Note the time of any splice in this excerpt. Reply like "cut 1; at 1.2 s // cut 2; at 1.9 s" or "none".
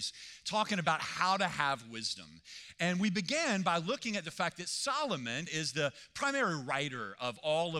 cut 1; at 5.5 s

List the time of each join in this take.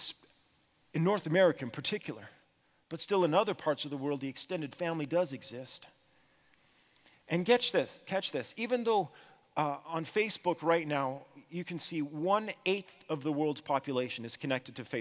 none

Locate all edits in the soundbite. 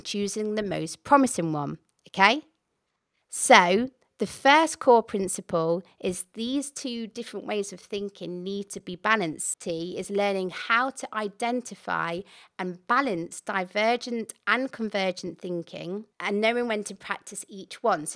cut 1; at 9.5 s // cut 2; at 16.1 s

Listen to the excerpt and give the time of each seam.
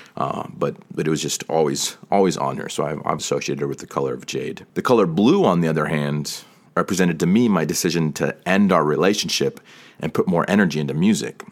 cut 1; at 3.2 s // cut 2; at 4.7 s

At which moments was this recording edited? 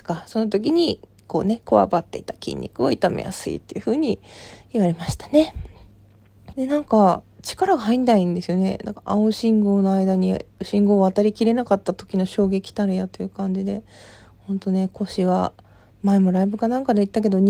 cut 1; at 6.5 s

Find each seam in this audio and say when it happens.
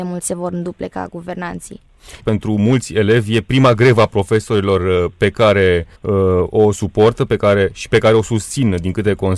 cut 1; at 2.2 s // cut 2; at 5.9 s

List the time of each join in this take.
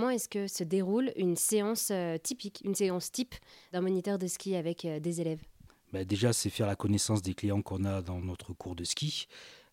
none

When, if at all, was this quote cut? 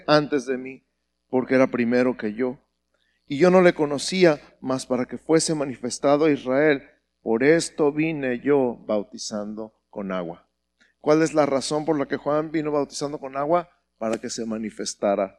none

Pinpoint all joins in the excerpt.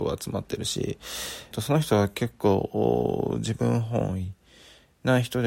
cut 1; at 1.5 s

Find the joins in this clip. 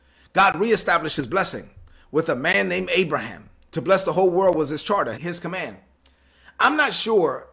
cut 1; at 5.1 s

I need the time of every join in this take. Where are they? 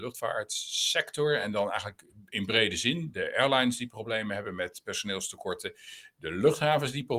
none

